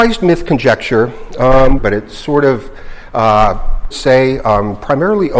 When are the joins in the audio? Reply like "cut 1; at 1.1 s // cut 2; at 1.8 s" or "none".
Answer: cut 1; at 1.8 s // cut 2; at 3.9 s